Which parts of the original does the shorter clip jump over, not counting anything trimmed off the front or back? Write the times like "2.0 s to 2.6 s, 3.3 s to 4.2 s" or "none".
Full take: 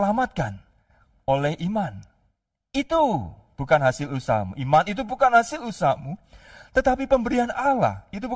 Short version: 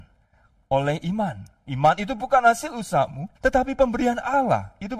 2.2 s to 4.6 s, 6.2 s to 6.7 s

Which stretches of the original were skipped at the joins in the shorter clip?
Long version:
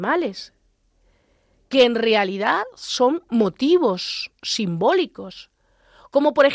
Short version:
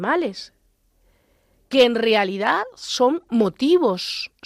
none

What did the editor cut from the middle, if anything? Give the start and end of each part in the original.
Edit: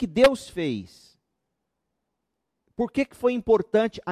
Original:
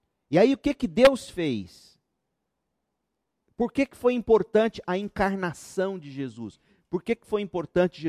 none

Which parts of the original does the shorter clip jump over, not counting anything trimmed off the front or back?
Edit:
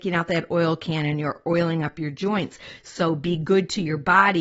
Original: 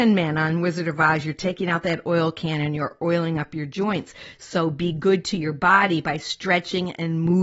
none

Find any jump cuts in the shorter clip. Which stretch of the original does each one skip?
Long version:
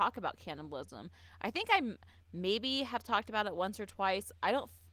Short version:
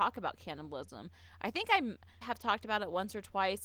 2.2 s to 2.9 s

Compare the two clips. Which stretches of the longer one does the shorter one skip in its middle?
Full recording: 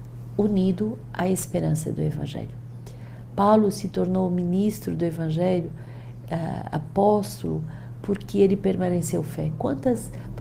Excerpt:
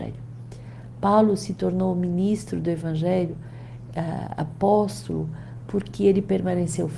none

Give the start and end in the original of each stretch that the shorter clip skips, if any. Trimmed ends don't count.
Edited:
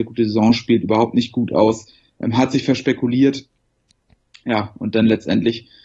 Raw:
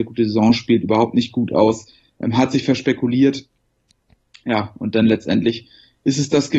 none

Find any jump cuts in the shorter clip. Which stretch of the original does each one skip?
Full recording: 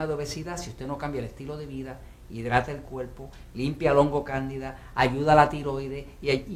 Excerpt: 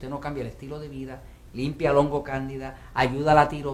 2.3 s to 3.5 s

